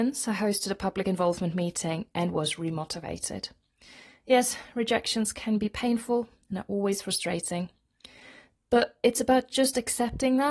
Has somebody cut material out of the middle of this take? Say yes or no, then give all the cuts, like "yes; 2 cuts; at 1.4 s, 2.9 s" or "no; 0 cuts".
no; 0 cuts